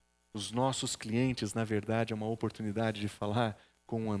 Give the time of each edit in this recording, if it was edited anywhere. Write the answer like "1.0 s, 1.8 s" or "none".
none